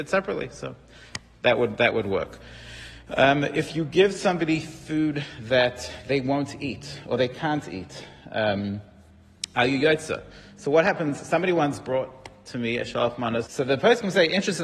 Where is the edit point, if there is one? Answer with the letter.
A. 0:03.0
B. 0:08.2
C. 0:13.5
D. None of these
C